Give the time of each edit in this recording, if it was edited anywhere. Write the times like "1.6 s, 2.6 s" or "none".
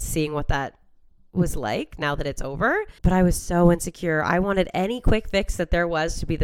3.0 s